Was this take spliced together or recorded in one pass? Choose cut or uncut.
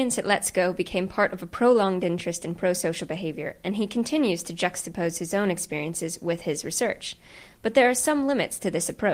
uncut